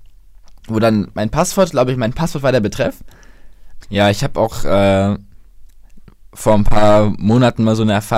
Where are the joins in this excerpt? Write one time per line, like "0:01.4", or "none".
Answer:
0:03.8